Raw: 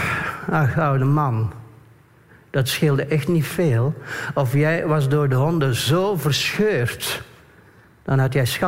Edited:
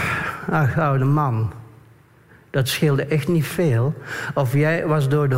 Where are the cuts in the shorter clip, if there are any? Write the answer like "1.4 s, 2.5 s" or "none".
none